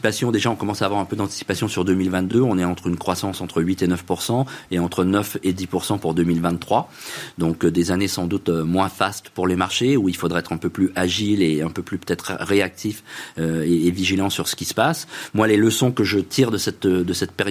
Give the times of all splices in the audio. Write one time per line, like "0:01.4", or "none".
none